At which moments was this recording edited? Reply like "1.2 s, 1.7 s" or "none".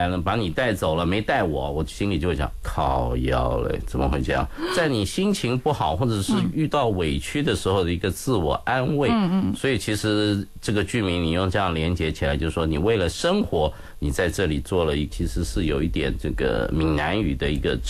15.1 s